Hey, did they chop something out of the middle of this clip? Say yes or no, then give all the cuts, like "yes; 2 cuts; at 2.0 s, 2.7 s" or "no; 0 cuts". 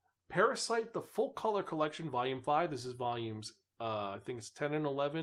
no; 0 cuts